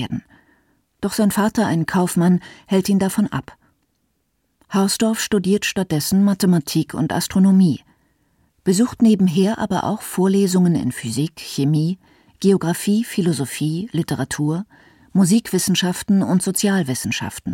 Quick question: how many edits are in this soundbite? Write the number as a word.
zero